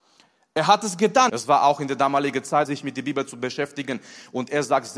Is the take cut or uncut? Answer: cut